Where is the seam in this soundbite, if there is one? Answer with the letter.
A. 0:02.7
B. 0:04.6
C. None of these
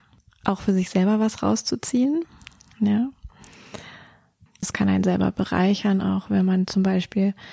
B